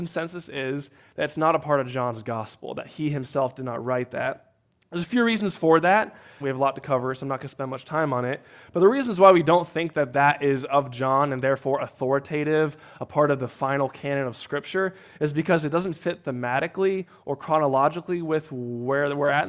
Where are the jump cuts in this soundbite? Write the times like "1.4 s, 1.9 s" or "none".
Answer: 6.4 s